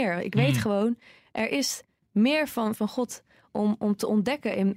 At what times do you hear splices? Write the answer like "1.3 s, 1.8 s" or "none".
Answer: 2.8 s